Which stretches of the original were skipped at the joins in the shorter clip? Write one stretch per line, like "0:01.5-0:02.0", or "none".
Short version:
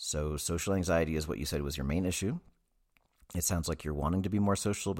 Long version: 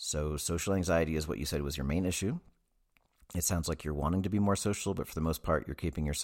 none

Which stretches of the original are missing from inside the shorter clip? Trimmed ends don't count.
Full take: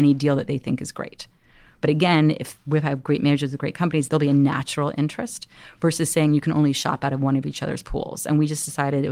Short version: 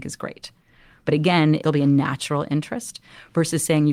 0:02.4-0:04.1

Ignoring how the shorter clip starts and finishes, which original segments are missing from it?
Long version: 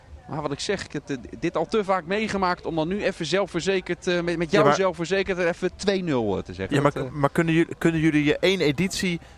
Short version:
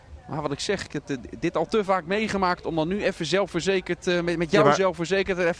none

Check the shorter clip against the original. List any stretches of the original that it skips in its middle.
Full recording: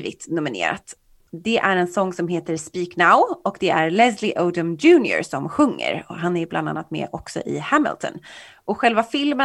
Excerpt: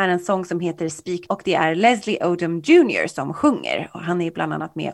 0:02.9-0:03.4

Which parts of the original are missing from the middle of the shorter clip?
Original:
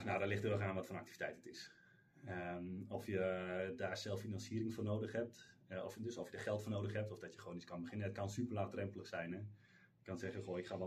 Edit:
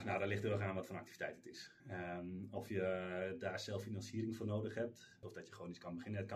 0:01.8-0:02.2
0:05.6-0:07.1

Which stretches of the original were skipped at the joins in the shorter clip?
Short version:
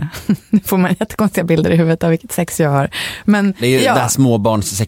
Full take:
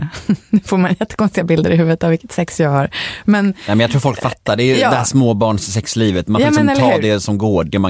0:03.6-0:04.6

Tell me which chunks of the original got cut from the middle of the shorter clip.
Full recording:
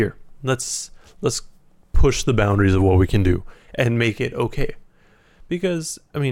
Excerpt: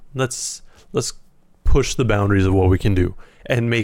none

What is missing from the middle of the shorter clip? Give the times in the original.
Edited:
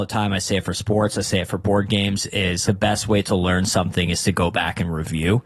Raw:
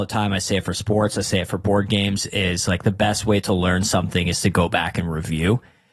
0:02.7-0:02.8

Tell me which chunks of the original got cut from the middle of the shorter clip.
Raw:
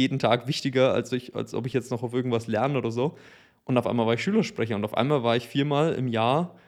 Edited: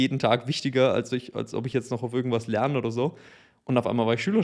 none

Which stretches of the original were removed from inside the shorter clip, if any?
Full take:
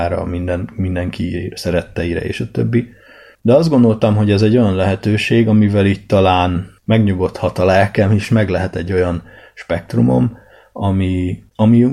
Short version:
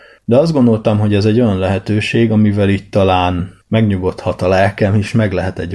none

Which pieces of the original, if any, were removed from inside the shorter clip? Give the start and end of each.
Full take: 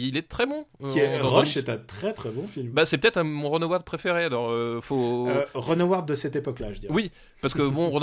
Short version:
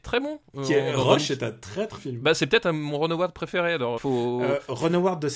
0:02.2-0:02.5
0:04.5-0:04.8

